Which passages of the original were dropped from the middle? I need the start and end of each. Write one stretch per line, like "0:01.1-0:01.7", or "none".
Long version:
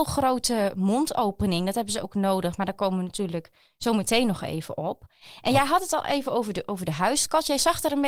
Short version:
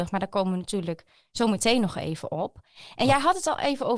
none